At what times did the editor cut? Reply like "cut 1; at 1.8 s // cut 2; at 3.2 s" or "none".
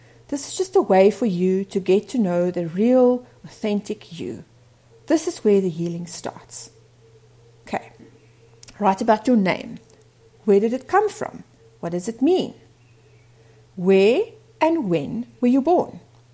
cut 1; at 8.0 s